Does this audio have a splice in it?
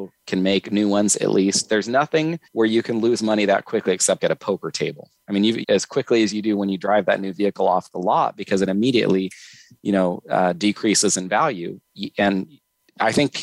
yes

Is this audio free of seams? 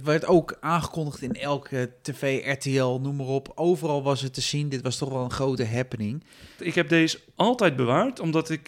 no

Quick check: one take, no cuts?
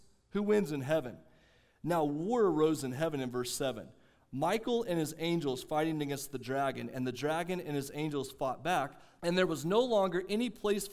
no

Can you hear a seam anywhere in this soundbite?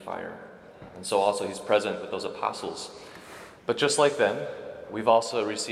yes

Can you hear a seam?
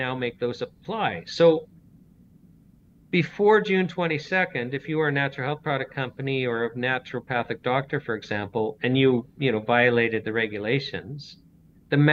no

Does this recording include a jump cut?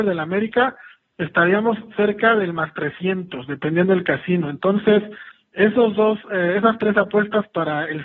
no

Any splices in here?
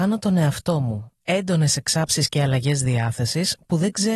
no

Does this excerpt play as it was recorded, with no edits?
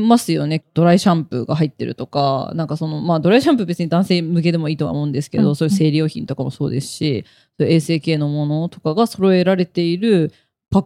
yes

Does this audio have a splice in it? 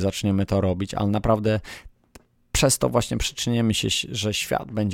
no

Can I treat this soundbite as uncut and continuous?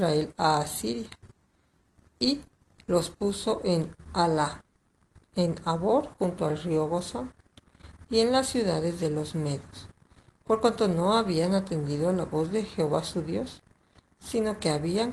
yes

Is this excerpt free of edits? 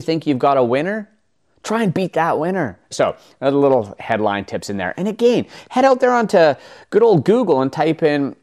no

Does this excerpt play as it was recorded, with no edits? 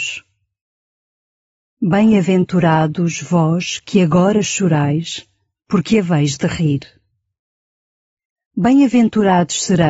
yes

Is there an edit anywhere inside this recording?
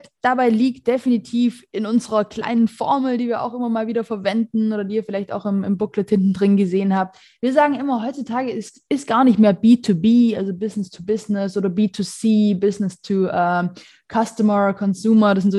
no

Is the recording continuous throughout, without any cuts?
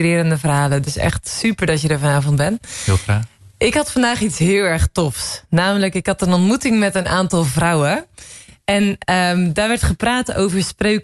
yes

